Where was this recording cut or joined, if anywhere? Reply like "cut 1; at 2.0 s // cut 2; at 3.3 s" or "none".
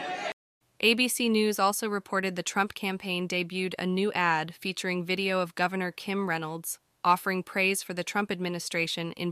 none